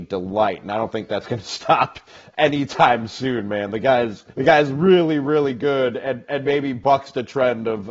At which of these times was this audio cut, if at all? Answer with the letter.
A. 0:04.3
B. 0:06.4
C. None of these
A